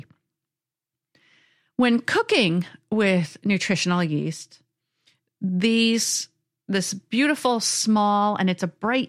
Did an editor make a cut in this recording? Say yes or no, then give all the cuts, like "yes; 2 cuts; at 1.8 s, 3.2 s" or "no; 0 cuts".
no; 0 cuts